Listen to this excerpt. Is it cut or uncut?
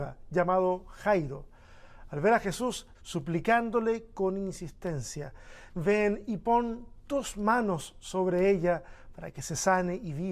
cut